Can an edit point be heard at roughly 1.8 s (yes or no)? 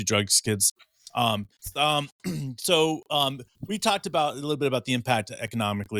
yes